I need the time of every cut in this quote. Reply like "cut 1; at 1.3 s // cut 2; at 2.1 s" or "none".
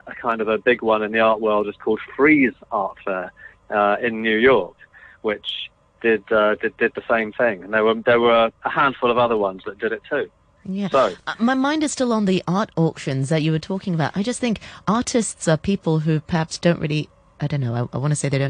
none